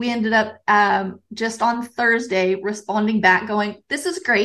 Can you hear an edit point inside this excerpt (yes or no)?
no